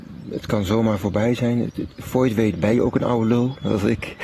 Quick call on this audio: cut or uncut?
uncut